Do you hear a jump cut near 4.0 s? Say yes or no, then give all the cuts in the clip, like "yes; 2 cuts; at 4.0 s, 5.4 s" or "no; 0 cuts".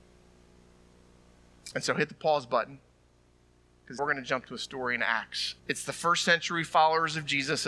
yes; 3 cuts; at 1.7 s, 4.0 s, 5.6 s